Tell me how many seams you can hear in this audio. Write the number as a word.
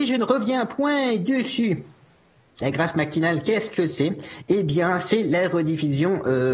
one